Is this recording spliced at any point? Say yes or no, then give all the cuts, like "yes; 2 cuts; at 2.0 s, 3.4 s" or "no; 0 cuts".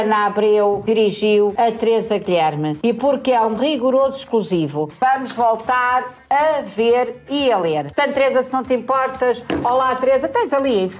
no; 0 cuts